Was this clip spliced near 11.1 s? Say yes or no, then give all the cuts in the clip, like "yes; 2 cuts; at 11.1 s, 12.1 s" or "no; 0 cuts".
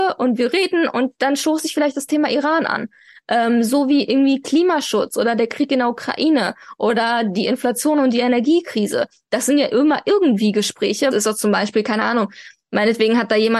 yes; 1 cut; at 11.1 s